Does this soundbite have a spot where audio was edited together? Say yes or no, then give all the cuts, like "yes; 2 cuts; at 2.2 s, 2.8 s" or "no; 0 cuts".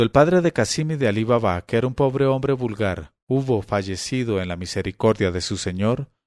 no; 0 cuts